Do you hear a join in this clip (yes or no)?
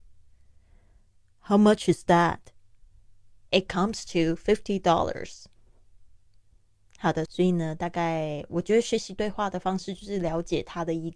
yes